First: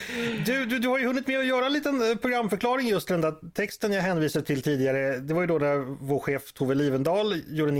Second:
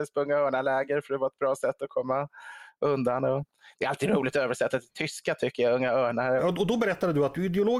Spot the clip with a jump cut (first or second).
second